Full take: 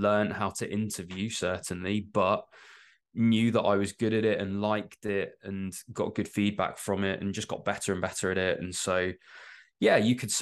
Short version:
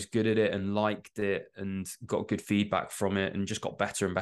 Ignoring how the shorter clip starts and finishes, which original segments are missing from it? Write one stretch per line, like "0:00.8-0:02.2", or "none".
none